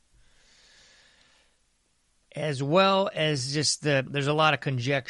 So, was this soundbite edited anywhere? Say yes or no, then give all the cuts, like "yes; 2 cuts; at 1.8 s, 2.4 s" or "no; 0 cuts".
yes; 1 cut; at 4.1 s